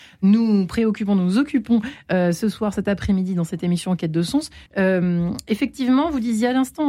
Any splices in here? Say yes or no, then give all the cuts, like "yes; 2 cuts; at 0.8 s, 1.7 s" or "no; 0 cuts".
yes; 1 cut; at 4.7 s